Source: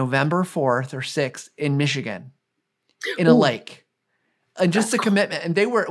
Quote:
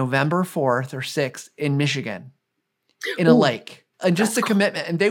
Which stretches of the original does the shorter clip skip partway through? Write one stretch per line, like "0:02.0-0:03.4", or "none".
0:03.9-0:04.5